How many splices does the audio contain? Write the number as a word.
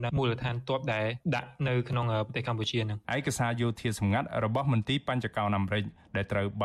one